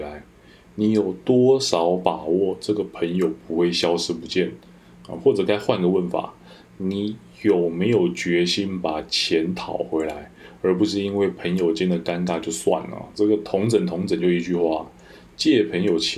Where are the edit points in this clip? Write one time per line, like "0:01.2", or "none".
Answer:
none